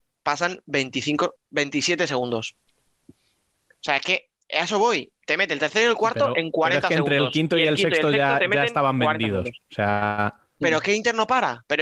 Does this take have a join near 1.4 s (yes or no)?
yes